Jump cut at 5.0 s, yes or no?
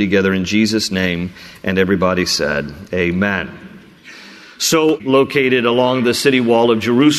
yes